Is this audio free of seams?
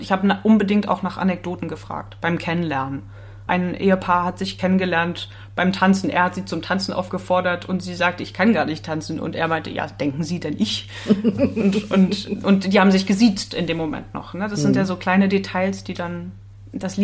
no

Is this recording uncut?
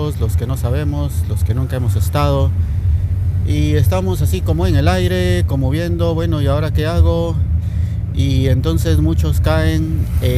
yes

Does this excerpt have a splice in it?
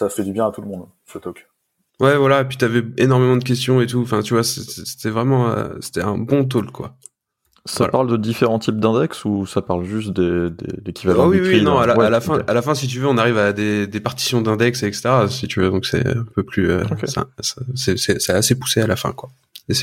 no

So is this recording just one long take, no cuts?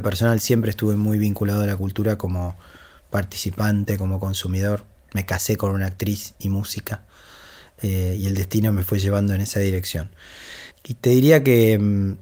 no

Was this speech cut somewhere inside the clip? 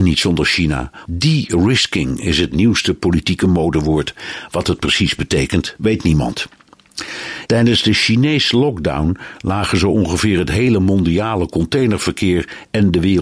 yes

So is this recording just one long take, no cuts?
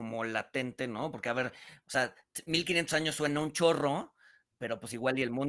yes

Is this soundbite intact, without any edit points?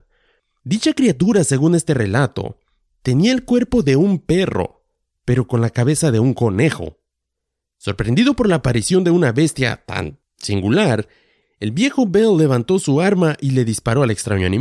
no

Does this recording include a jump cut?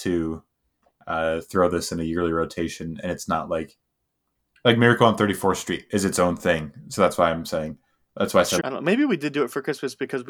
yes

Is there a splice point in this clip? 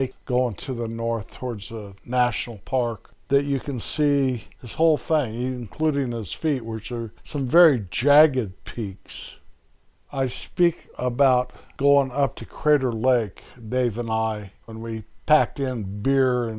yes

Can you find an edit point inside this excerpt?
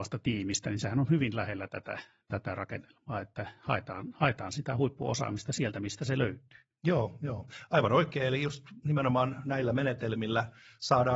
no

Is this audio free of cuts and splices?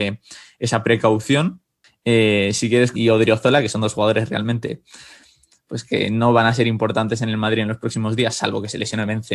no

